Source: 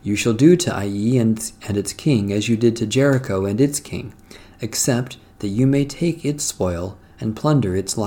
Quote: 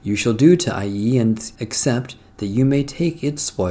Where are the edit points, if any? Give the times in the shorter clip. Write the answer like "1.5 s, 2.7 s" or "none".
1.6 s